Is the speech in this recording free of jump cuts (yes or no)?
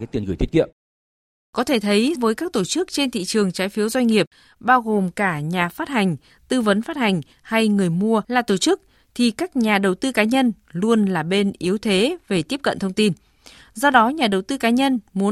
no